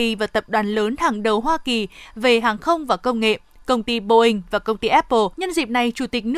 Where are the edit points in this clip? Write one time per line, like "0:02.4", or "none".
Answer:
0:05.3